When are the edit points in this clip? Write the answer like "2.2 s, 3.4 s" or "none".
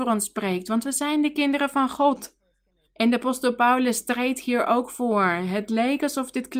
2.9 s